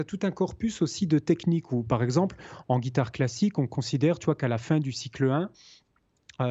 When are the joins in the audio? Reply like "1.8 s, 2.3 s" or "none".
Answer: none

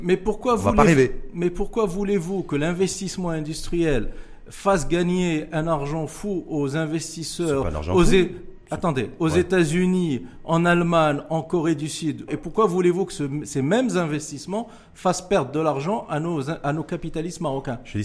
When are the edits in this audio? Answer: 12.3 s

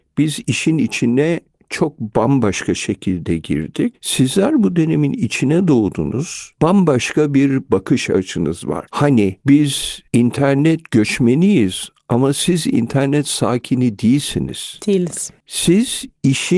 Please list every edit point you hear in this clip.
3.9 s, 8.9 s

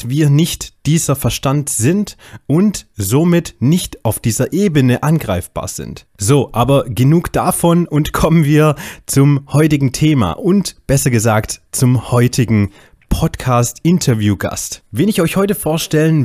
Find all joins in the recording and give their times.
6.1 s

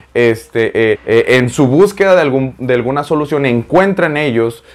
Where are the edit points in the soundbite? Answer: 0.9 s

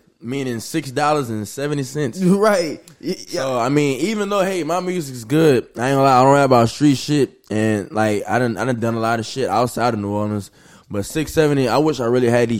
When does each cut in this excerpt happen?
none

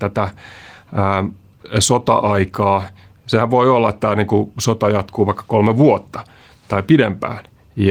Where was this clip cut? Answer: none

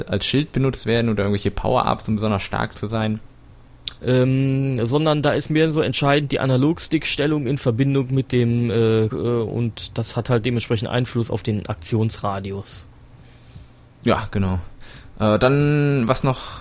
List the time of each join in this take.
4.0 s, 9.1 s

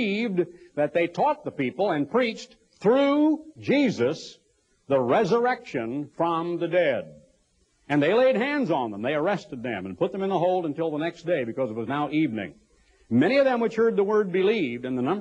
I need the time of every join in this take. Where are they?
none

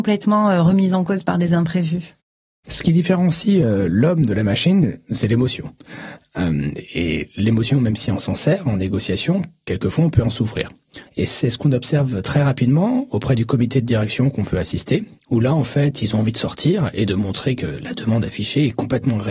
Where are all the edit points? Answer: 11.1 s

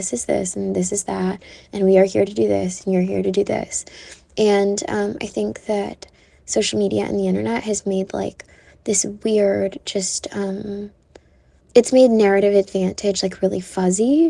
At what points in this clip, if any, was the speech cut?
none

